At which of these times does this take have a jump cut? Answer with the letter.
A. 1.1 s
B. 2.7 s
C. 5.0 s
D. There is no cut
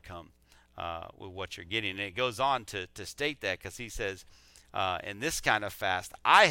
D